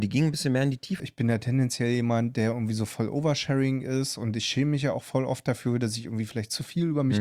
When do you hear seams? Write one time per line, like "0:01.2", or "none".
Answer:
0:01.0